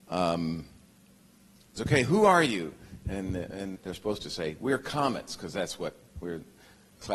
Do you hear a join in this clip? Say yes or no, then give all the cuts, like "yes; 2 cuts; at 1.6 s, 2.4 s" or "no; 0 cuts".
yes; 2 cuts; at 1.8 s, 3.8 s